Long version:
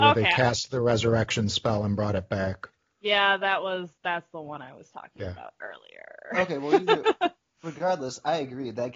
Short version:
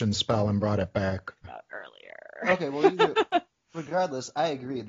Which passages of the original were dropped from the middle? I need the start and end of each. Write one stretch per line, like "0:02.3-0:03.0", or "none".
0:02.8-0:05.3